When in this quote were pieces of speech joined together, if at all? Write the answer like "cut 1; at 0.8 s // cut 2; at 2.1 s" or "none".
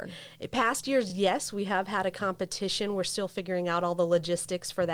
none